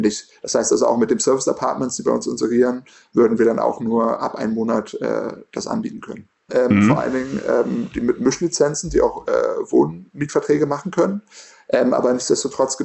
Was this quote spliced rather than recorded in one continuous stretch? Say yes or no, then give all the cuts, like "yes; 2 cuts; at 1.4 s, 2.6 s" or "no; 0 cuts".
yes; 1 cut; at 6.5 s